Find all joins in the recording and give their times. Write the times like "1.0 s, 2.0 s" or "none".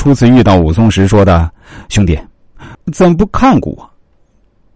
2.7 s